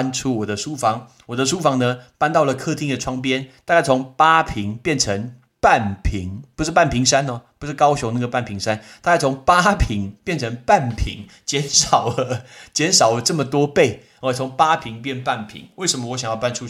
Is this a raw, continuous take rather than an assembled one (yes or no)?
yes